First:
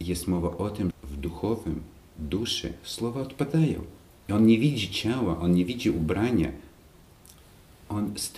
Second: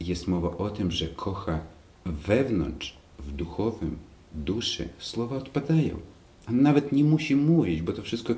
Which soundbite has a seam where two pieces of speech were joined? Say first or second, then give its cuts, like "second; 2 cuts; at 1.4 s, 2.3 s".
first; 2 cuts; at 0.9 s, 4.2 s